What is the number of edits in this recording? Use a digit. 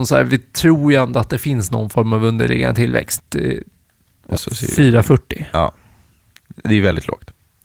2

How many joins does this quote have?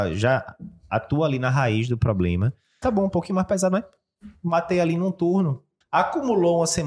2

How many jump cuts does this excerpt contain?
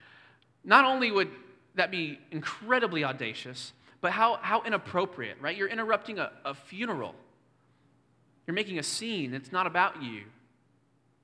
0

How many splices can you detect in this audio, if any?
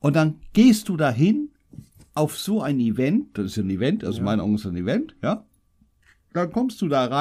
0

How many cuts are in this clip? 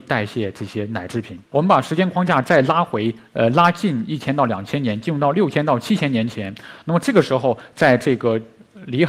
1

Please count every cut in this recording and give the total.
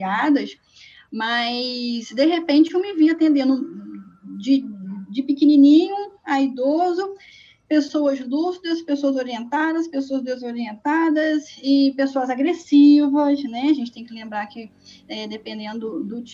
0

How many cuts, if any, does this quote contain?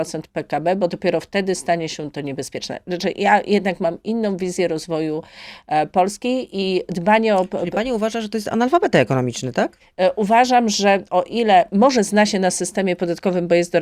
0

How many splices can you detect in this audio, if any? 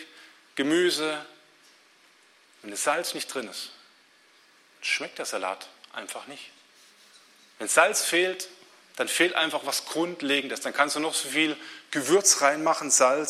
0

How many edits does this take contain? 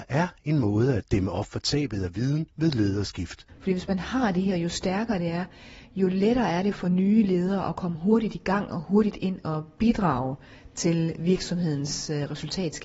1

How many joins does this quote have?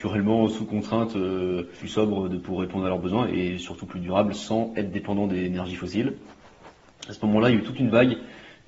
1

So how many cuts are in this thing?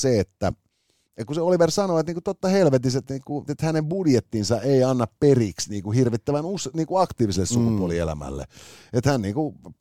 1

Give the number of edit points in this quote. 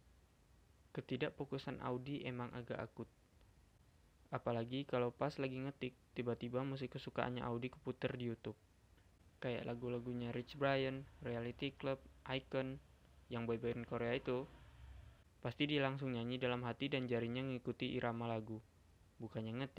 0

